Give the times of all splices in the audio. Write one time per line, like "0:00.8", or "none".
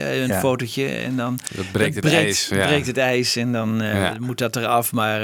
none